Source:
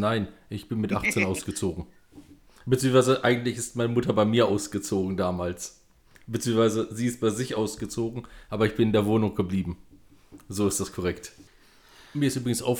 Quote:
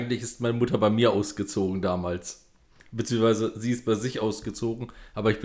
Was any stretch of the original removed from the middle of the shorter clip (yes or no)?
no